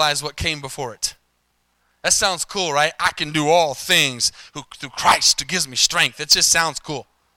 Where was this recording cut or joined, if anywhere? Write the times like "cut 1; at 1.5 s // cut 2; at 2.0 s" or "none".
none